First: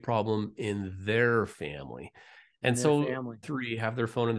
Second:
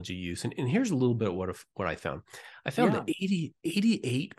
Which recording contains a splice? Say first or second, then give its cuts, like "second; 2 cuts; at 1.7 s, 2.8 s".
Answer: first; 1 cut; at 3.4 s